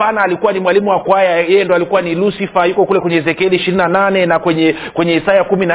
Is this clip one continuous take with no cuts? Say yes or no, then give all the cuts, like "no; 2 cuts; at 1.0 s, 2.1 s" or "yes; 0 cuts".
yes; 0 cuts